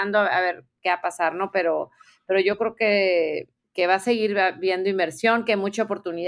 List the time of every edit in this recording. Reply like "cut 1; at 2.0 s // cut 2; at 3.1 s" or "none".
cut 1; at 3.7 s